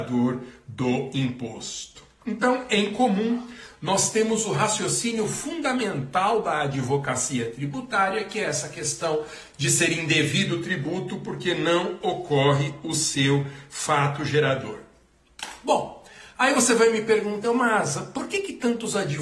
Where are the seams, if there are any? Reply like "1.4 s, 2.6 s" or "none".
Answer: 17.4 s